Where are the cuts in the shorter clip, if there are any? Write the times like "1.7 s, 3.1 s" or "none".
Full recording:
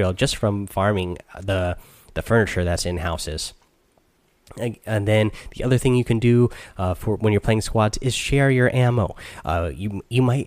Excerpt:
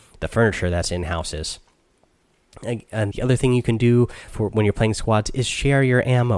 3.1 s, 4.3 s

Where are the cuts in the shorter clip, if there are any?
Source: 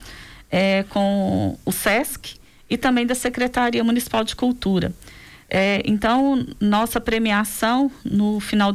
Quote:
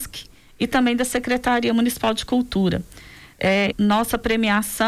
3.7 s

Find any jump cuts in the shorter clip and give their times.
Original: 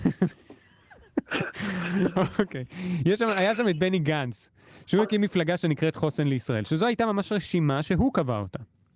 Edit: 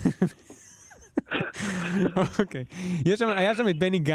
none

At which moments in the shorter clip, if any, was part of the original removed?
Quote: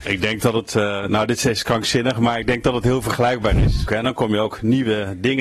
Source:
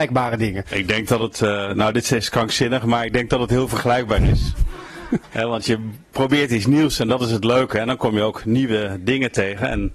3.9 s

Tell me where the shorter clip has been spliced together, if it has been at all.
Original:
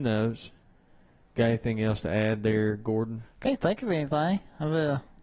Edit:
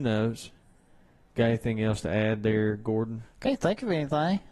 none

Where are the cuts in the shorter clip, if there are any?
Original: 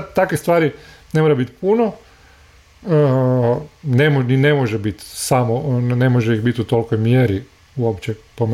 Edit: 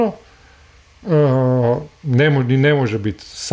none

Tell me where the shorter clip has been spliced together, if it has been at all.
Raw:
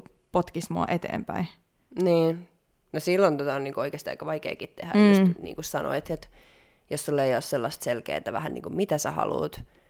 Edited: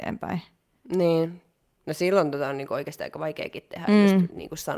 none

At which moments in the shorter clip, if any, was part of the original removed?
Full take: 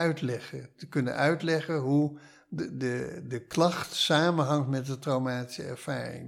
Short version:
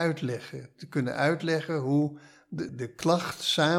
2.7 s

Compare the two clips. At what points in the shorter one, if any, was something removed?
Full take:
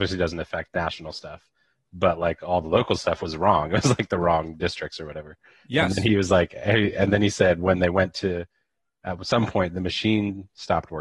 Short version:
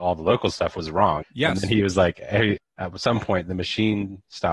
1.2 s, 2.6 s

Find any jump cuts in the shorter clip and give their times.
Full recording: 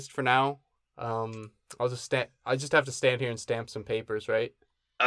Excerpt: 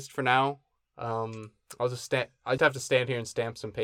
2.6 s

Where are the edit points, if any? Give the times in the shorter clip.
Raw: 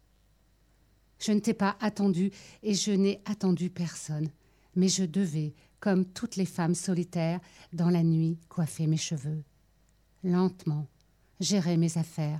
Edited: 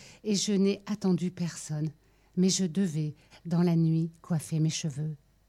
3.3 s

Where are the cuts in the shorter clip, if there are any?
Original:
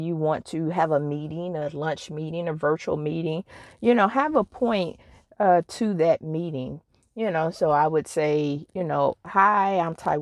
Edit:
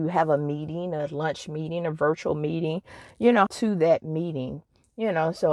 3.5 s

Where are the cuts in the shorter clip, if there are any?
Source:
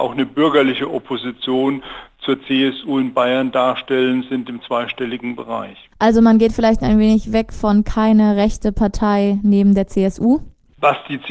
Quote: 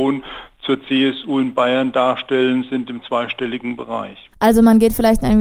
none

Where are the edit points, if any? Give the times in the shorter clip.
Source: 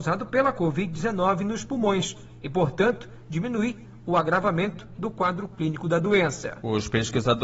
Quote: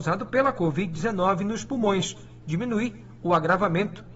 2.4 s

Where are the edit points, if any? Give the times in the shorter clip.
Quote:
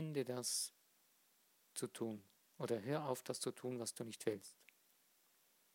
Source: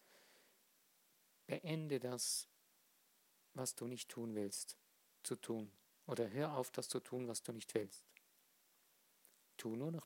1.6 s

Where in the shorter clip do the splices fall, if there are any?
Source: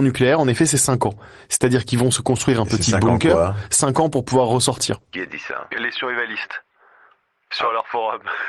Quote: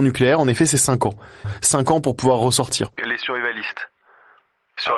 1.4 s, 3.0 s

